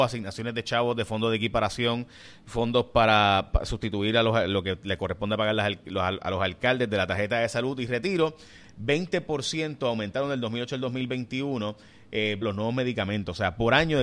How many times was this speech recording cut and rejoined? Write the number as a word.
two